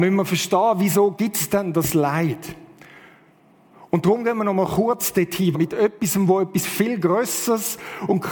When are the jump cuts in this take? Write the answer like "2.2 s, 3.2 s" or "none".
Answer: 5.5 s

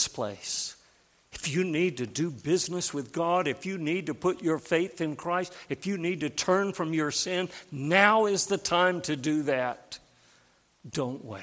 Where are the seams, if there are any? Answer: none

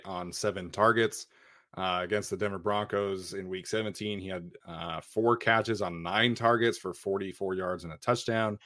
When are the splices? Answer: none

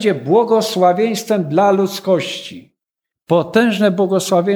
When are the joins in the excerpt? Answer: 3.1 s

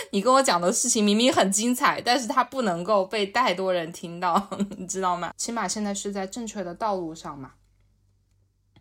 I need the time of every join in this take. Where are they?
5.3 s

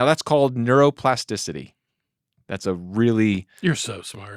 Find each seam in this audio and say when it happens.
none

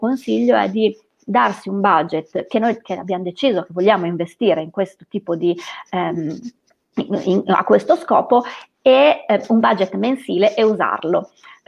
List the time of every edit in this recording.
none

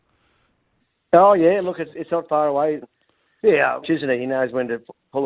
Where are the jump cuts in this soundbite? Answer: 2.8 s, 3.8 s

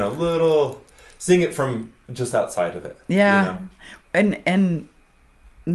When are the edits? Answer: 4.0 s

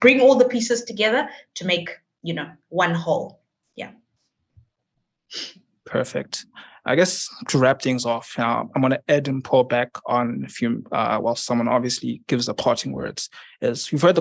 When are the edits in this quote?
none

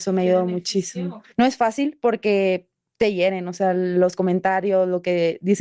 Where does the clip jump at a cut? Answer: none

